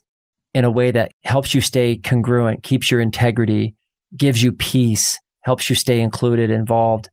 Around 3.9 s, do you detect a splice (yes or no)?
no